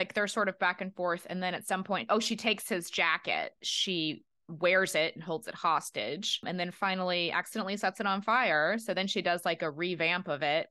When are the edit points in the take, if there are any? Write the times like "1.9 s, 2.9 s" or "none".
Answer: none

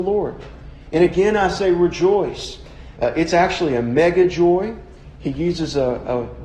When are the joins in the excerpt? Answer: 2.9 s

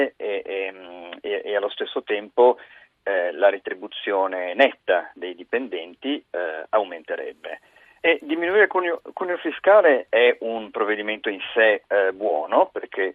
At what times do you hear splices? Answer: 8.0 s

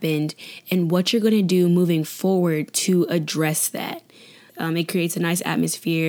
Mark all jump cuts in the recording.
4.5 s

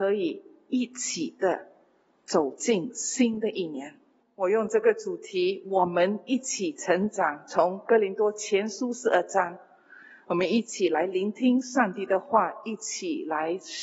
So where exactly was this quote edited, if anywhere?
4.2 s

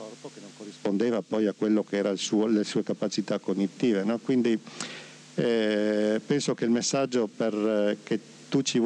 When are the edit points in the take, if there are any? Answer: none

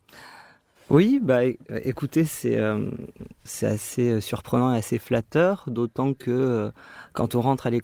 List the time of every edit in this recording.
3.5 s

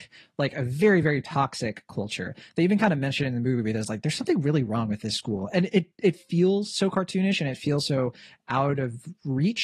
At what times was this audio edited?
none

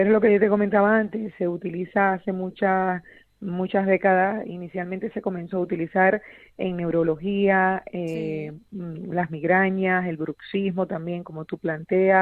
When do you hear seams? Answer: none

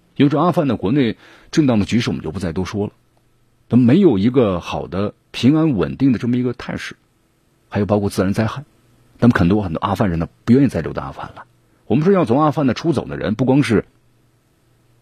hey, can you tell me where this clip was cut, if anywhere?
none

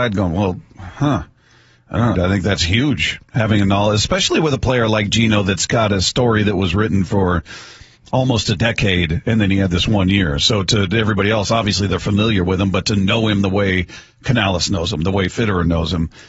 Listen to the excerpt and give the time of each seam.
2.1 s

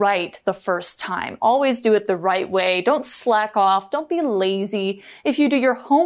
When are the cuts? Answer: none

